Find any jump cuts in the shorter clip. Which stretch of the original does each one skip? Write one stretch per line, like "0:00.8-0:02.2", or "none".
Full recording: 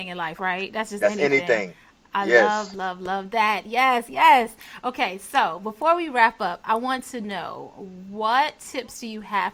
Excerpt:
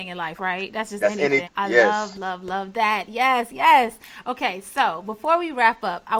0:01.4-0:02.0